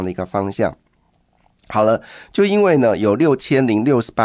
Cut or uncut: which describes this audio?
uncut